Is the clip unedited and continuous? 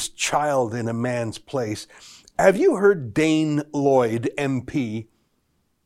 yes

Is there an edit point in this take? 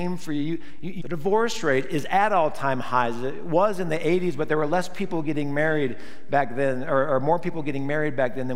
yes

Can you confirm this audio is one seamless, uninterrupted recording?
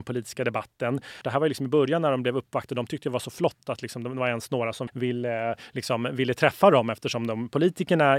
no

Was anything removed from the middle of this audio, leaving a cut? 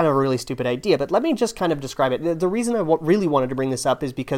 no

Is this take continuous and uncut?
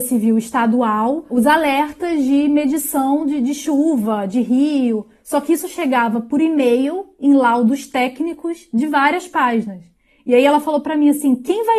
yes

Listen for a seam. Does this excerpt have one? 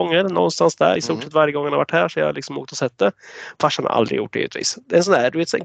no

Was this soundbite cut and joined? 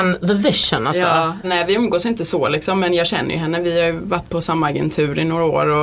yes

